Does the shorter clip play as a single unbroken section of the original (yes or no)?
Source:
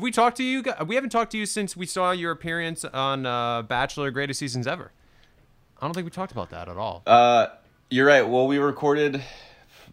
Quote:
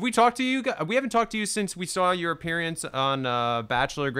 yes